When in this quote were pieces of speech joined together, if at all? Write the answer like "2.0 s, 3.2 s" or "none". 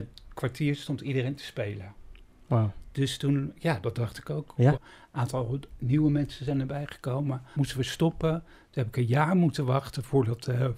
4.7 s, 7.5 s